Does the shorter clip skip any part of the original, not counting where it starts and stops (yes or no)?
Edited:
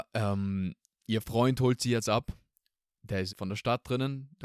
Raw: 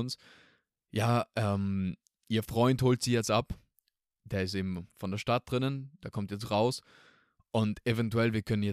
yes